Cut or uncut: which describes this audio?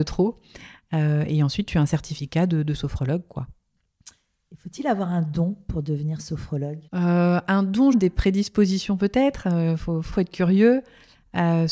cut